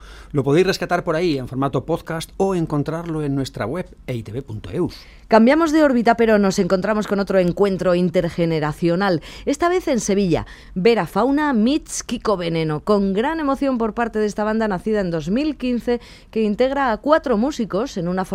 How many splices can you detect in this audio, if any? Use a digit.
0